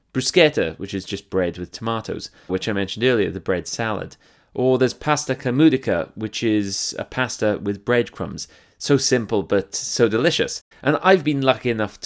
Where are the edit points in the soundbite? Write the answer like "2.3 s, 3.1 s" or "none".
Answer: 2.5 s, 10.7 s